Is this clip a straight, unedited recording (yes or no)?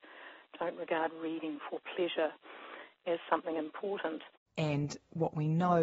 yes